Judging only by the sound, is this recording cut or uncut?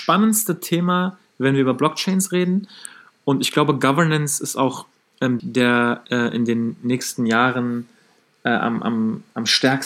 cut